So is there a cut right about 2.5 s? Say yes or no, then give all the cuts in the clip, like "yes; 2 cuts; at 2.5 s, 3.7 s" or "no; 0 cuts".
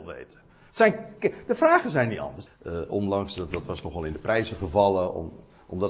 yes; 1 cut; at 2.5 s